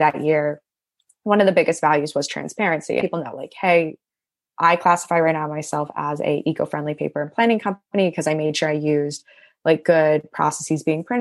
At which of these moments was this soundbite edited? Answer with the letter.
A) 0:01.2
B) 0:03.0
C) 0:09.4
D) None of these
B